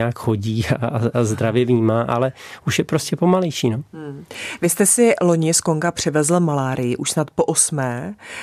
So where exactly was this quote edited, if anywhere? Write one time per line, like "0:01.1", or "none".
none

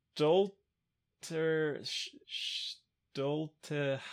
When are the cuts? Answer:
0:02.2

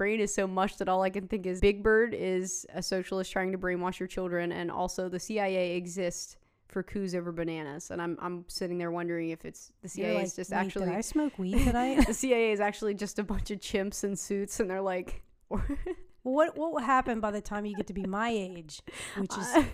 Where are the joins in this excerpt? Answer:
0:01.6

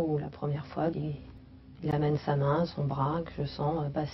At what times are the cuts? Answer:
0:00.9

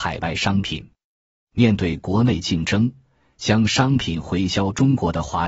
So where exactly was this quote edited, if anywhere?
none

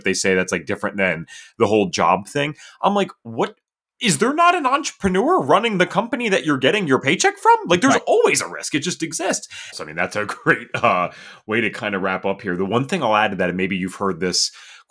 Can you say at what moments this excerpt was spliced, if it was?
0:09.7

